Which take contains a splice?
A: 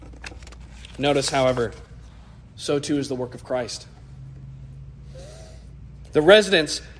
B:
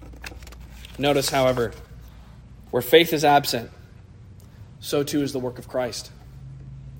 A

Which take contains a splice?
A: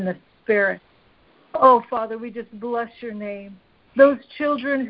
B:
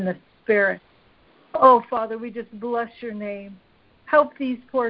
A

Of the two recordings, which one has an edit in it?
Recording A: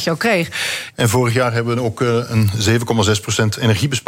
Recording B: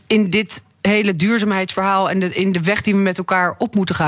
A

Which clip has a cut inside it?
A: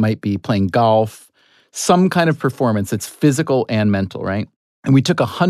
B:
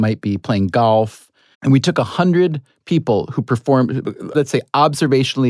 B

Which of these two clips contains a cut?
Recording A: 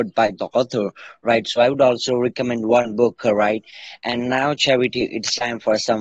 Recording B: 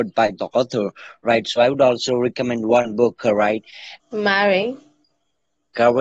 B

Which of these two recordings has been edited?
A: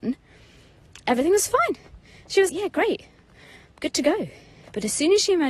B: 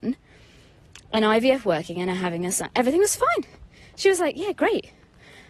A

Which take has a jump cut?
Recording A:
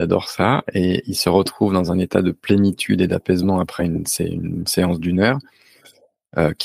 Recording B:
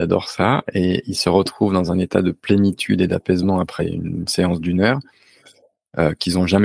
B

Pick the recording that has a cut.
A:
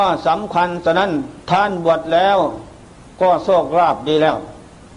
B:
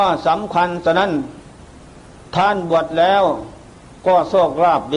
A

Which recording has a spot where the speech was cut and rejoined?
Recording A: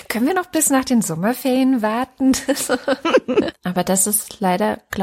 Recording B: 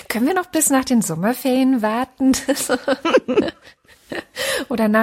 A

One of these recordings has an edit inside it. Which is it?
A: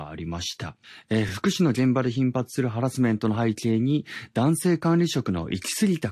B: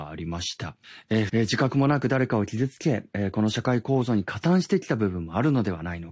B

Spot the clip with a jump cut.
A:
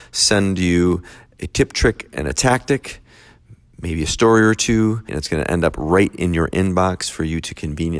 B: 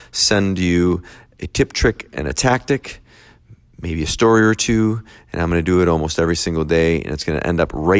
A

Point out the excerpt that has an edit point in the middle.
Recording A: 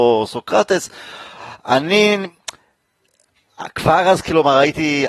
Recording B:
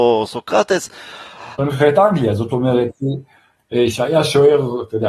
B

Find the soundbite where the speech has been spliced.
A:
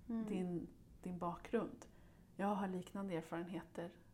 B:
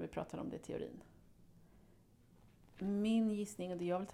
A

